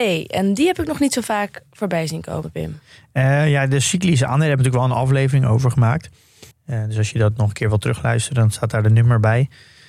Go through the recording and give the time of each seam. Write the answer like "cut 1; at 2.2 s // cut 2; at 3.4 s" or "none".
cut 1; at 6.5 s